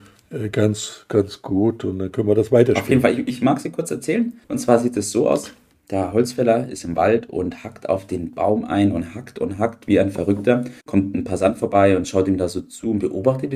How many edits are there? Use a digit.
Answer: 2